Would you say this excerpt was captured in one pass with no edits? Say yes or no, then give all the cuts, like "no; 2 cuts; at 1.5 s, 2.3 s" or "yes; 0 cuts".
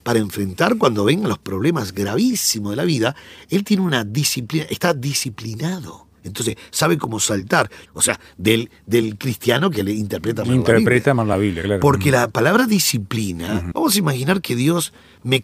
no; 3 cuts; at 6.2 s, 7.9 s, 13.7 s